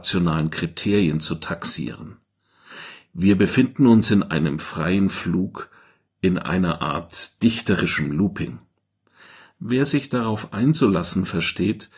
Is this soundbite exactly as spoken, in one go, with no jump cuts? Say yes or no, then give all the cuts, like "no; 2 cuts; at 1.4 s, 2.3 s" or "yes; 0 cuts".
yes; 0 cuts